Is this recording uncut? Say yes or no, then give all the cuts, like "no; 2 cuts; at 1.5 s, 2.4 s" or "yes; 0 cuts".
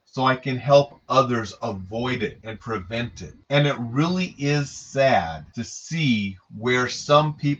yes; 0 cuts